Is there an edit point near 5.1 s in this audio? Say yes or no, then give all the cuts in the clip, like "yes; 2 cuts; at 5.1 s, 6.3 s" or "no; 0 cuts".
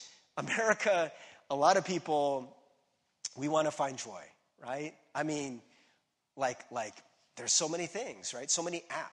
no; 0 cuts